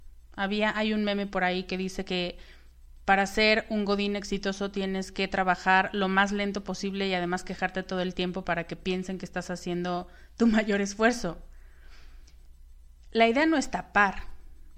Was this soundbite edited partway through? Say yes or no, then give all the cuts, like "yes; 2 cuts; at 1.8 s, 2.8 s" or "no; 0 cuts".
no; 0 cuts